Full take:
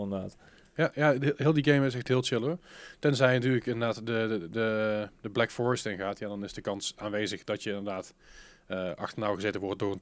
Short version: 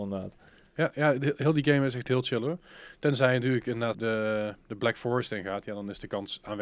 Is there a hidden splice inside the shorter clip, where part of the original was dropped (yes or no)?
yes